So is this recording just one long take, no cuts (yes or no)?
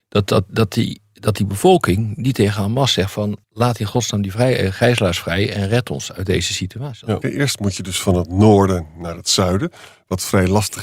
no